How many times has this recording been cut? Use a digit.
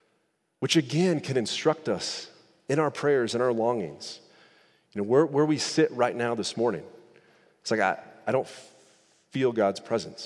0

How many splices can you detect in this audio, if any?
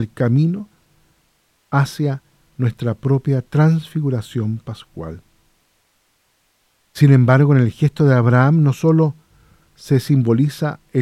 0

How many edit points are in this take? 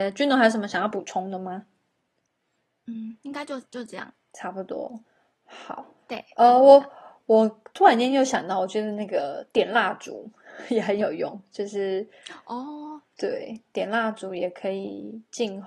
0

